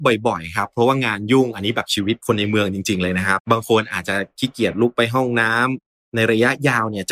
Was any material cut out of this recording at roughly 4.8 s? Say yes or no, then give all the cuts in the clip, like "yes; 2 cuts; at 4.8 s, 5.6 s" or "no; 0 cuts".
no; 1 cut; at 3.4 s